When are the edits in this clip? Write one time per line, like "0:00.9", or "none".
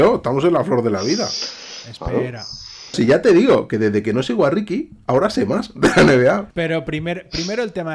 0:02.9
0:06.5